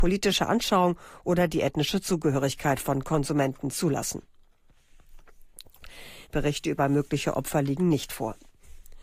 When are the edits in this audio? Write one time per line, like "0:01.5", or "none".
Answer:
0:06.2